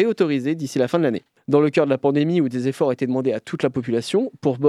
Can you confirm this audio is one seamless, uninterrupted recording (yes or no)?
no